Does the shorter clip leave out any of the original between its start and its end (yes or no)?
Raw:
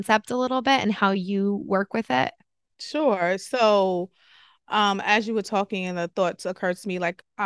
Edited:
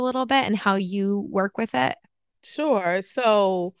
no